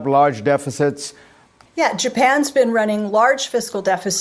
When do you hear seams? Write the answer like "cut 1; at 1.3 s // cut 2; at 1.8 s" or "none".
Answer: cut 1; at 1.7 s